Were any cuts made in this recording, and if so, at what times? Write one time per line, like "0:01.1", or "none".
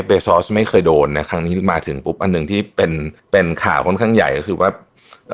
0:03.2